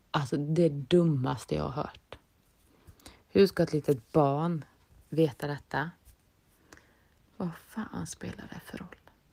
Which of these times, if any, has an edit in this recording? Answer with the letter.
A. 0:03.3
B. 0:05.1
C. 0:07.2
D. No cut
C